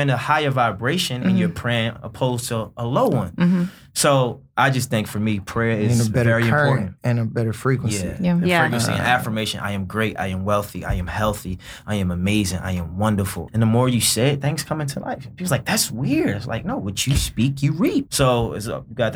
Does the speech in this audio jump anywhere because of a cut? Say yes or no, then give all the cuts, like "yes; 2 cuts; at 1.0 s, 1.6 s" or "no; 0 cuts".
yes; 2 cuts; at 13.5 s, 18.1 s